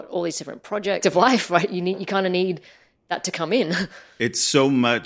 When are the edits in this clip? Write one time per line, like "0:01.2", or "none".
0:01.0